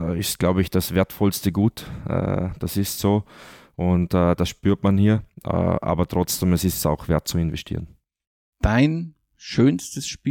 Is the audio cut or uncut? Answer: uncut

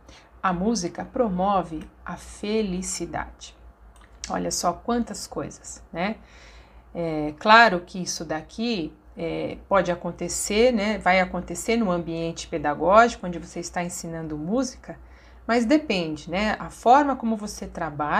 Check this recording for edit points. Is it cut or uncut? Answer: uncut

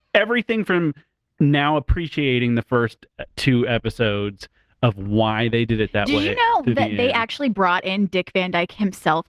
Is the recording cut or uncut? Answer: uncut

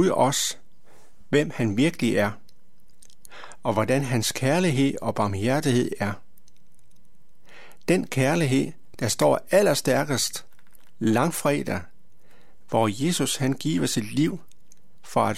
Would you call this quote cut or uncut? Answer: uncut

